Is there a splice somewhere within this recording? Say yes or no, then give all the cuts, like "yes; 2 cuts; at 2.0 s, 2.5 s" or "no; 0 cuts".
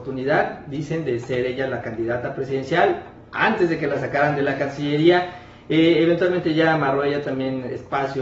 no; 0 cuts